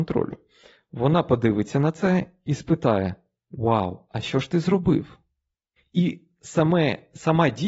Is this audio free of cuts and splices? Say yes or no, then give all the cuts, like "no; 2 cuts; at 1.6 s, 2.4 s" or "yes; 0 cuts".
no; 1 cut; at 5.8 s